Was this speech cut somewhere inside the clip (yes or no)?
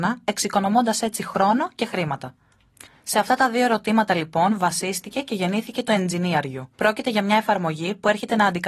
yes